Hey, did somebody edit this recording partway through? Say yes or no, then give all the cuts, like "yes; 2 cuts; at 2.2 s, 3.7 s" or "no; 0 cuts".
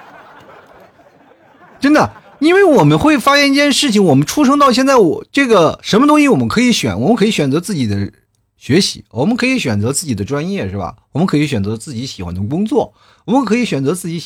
no; 0 cuts